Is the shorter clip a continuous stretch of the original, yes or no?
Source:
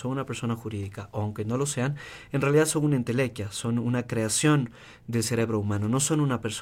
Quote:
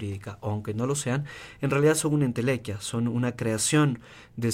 yes